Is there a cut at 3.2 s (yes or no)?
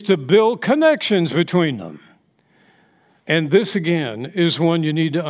yes